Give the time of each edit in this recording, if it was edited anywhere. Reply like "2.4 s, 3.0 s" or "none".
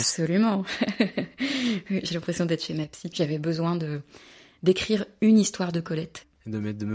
3.1 s